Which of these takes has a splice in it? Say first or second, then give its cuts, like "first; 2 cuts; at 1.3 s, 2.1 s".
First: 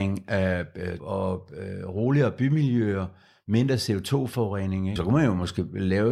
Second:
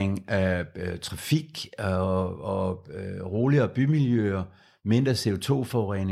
first; 2 cuts; at 1.0 s, 5.0 s